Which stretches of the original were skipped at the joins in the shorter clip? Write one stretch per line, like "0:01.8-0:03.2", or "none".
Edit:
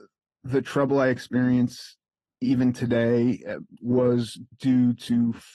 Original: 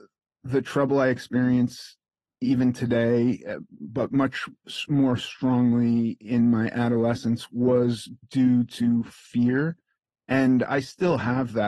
0:03.8-0:07.5